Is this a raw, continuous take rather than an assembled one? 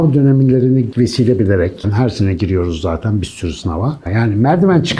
no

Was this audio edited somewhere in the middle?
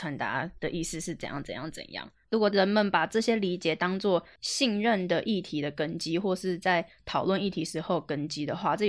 no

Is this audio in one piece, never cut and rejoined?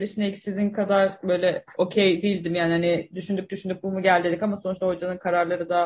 yes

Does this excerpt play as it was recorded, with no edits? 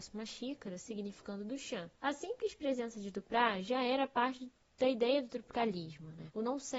yes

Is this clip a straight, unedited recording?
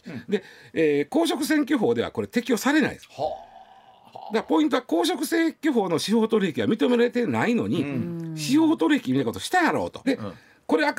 no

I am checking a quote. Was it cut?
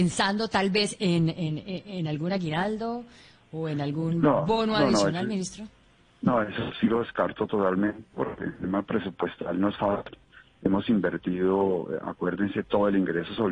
no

